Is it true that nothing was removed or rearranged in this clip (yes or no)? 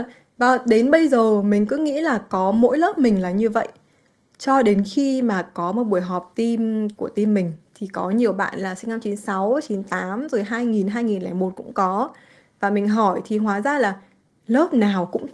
yes